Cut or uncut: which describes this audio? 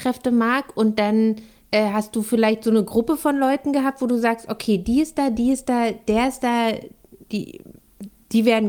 uncut